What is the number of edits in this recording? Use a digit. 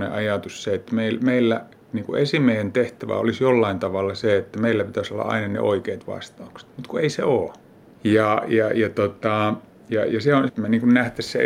2